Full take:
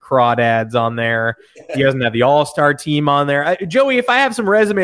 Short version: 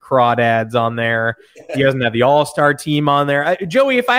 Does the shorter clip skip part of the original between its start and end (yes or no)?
no